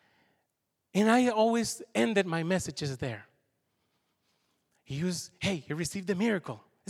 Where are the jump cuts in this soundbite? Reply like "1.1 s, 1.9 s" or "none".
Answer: none